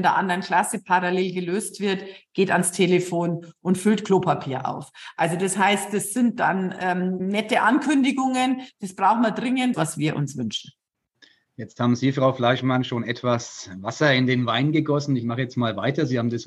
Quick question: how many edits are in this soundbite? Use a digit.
2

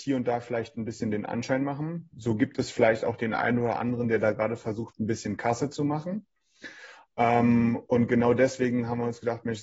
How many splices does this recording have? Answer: 0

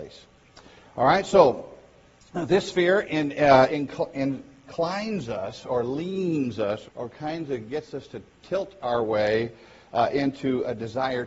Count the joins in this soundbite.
2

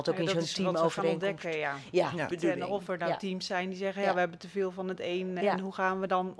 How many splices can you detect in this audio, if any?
1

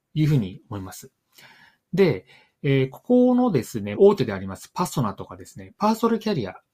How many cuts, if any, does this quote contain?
1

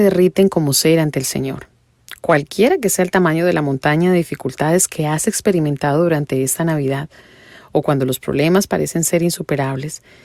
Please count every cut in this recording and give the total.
0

